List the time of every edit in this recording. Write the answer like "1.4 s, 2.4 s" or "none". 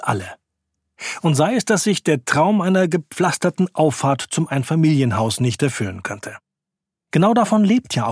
none